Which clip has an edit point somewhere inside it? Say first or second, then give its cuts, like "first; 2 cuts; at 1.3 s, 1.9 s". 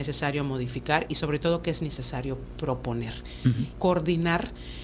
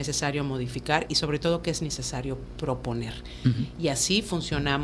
first; 1 cut; at 3.7 s